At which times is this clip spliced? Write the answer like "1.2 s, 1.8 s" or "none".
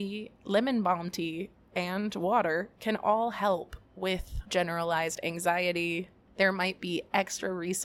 6.3 s